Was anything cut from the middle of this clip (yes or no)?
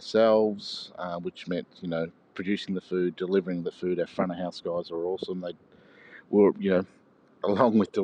no